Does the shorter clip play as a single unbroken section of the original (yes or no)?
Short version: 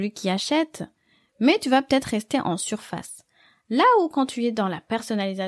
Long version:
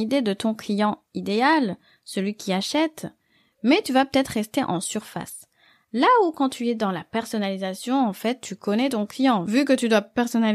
yes